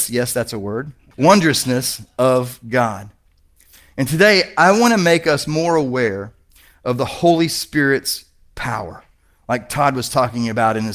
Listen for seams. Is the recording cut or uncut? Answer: cut